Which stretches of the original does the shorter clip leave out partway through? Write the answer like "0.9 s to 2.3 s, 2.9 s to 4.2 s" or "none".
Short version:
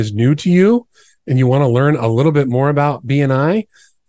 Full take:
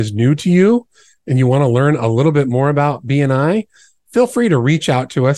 none